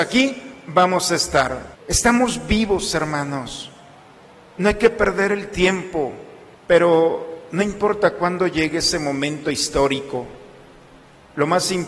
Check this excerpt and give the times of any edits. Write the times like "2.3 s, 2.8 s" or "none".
1.7 s, 6.6 s